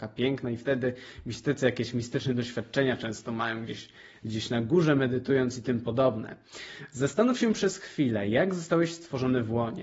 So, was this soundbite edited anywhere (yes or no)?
no